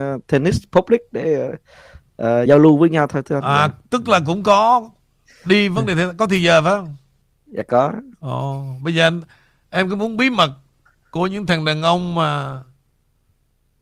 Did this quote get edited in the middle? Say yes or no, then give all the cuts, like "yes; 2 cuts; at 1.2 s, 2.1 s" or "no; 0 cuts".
no; 0 cuts